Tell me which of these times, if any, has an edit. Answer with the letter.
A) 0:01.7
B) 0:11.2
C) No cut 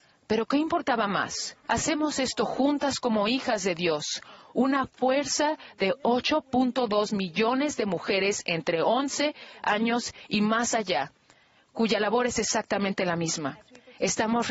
A